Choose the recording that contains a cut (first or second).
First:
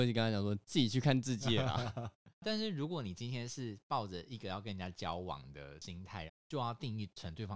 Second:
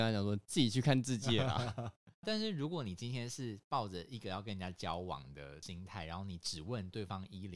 first